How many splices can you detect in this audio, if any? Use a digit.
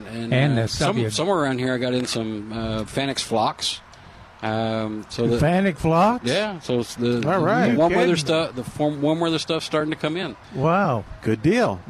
1